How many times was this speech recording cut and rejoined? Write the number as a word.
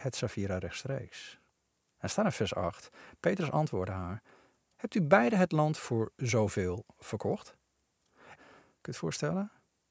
two